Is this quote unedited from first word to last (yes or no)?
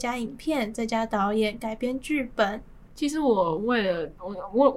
no